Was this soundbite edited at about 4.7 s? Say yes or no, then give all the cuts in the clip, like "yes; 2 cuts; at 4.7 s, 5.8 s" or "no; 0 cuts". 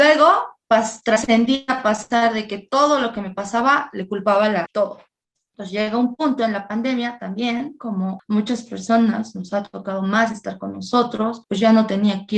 yes; 1 cut; at 4.7 s